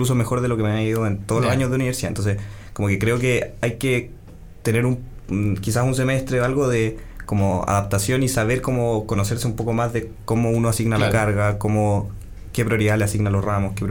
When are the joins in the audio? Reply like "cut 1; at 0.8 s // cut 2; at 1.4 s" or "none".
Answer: none